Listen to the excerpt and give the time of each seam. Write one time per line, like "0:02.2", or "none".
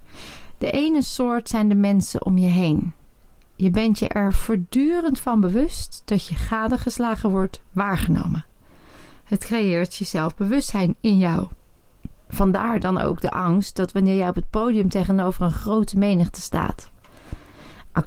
none